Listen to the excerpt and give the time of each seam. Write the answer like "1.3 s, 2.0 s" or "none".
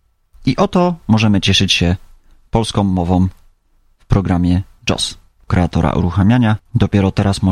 5.5 s

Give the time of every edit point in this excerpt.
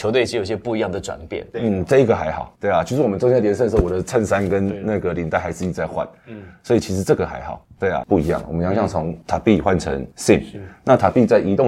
1.5 s, 8.0 s

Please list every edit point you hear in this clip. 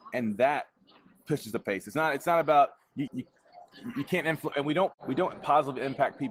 3.1 s, 4.5 s

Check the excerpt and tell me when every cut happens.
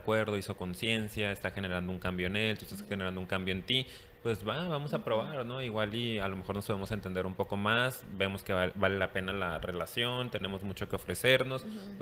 none

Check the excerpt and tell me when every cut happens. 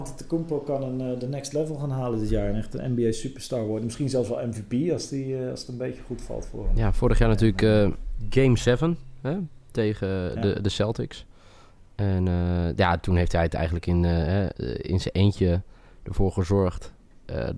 none

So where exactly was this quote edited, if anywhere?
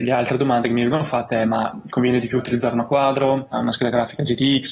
3.5 s

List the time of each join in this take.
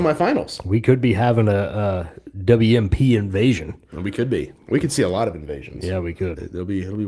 4.5 s

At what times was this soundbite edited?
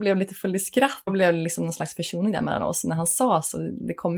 1.1 s

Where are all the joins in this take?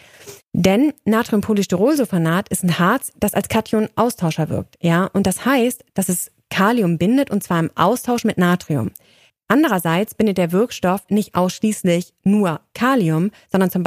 9.3 s

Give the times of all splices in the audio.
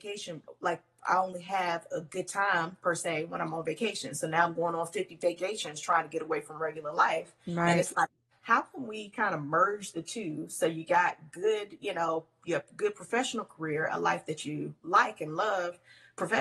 none

